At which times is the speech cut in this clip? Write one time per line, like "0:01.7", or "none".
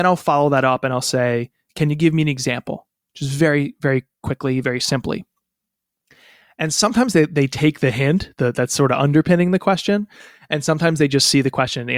none